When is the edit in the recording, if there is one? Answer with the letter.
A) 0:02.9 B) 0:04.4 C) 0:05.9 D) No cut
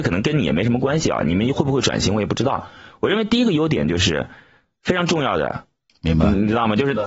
C